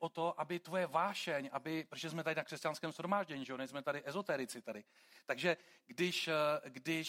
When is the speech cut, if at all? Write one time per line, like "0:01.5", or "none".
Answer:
none